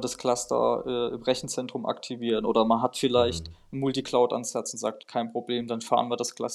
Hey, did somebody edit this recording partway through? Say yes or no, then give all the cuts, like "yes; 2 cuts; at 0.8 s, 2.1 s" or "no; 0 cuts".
no; 0 cuts